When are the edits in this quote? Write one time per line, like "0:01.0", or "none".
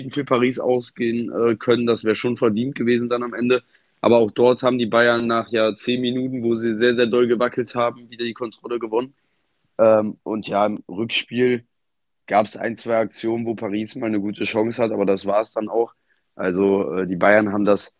none